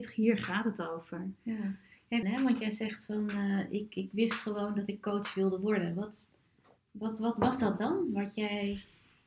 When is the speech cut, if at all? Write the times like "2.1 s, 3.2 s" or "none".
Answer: 2.2 s